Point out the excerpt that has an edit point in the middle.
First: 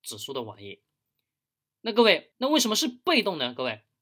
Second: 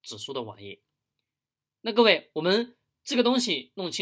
first; 1 cut; at 2.3 s

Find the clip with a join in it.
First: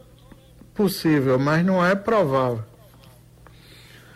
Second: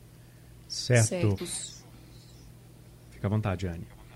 second; 1 cut; at 1.4 s

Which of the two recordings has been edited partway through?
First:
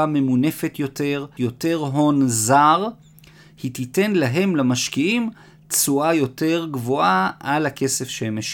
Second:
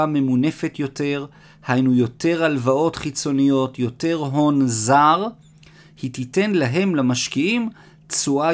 first; 1 cut; at 1.4 s

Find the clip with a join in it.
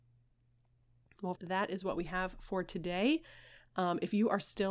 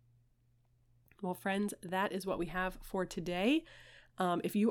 first; 1 cut; at 1.4 s

